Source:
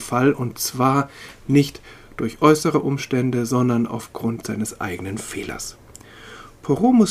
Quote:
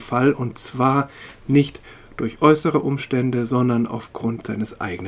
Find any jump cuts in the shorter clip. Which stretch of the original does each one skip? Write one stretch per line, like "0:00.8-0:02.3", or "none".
none